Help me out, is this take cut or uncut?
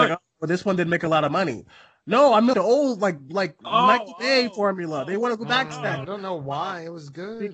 cut